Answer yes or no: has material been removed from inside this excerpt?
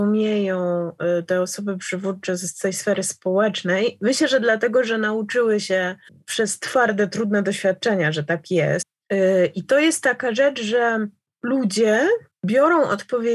no